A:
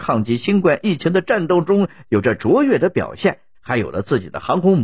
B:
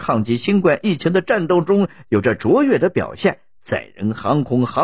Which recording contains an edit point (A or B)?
A